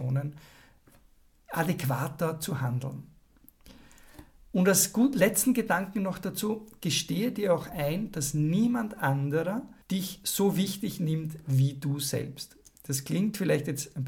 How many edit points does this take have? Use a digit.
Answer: 1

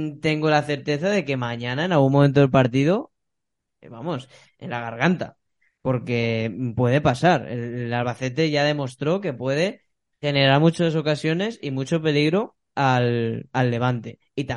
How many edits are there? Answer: 1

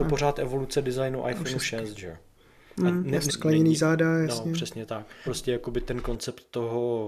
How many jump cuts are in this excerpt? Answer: 2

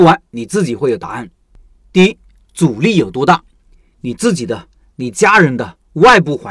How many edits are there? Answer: 0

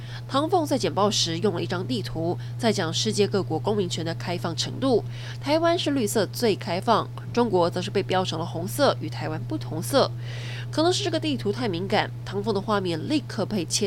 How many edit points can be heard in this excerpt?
0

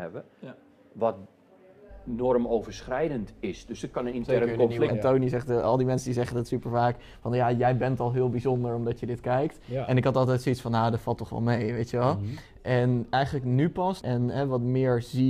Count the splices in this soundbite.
2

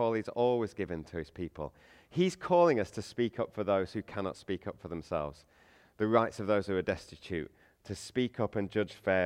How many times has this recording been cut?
0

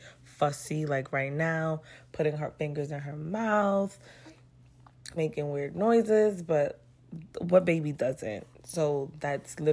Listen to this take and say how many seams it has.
1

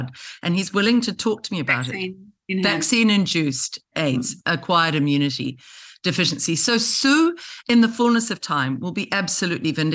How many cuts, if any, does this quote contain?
0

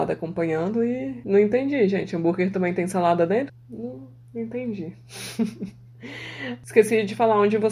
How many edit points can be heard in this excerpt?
1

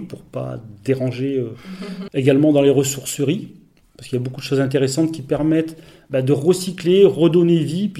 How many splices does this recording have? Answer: 1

